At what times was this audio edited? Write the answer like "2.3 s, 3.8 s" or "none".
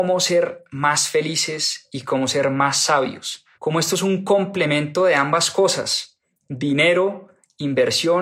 3.5 s